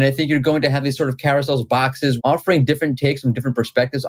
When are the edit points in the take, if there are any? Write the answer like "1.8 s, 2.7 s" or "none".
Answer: 2.2 s